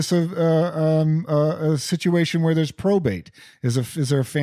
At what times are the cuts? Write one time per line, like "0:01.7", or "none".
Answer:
none